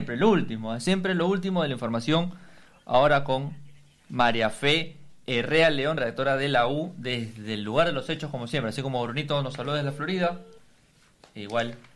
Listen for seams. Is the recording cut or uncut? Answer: uncut